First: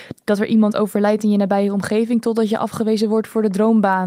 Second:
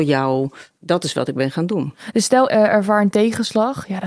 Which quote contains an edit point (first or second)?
second